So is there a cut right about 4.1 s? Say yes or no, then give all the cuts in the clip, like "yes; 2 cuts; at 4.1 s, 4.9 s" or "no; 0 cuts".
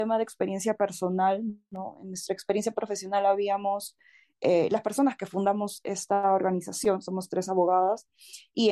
no; 0 cuts